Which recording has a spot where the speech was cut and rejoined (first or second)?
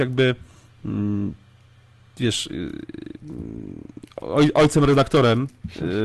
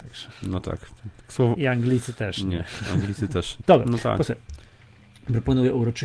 second